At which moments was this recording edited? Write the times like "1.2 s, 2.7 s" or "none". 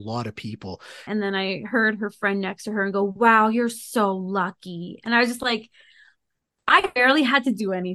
1.1 s